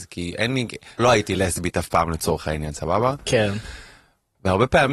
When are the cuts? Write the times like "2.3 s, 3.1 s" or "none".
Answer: 1.0 s